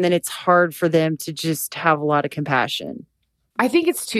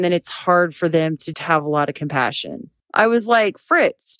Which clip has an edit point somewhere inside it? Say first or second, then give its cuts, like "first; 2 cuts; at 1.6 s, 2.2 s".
second; 2 cuts; at 1.3 s, 2.8 s